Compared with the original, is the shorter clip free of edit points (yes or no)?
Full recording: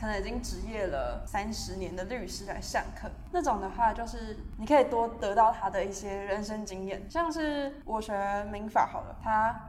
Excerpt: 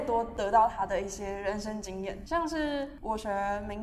yes